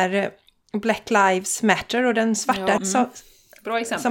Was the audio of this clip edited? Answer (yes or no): yes